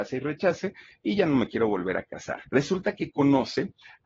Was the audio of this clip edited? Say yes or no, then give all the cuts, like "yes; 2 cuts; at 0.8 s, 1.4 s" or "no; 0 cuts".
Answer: yes; 1 cut; at 2.5 s